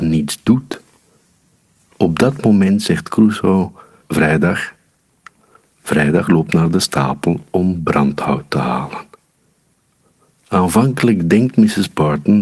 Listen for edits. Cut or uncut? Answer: cut